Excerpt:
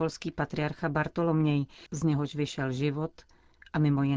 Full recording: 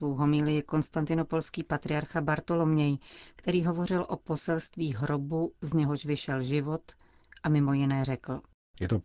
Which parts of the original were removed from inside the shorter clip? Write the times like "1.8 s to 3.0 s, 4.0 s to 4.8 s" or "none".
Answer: 3.2 s to 5.6 s